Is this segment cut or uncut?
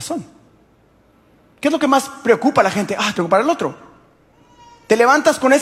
cut